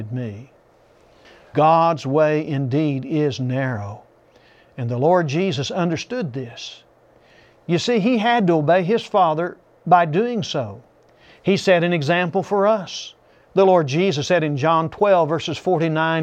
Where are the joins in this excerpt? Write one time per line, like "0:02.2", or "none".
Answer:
0:01.5